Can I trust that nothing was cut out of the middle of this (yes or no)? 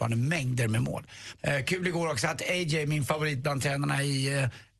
no